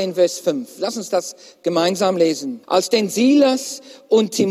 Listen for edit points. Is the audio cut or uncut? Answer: cut